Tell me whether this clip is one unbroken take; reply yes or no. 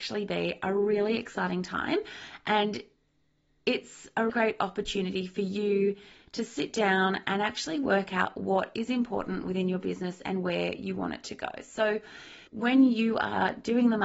no